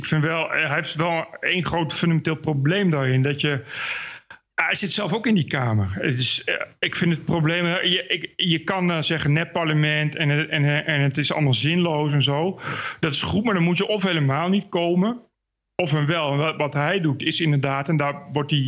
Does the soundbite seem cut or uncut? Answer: uncut